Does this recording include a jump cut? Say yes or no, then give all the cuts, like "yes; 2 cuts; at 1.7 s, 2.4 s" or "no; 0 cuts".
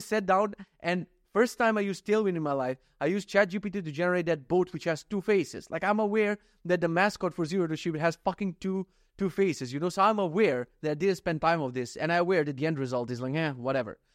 no; 0 cuts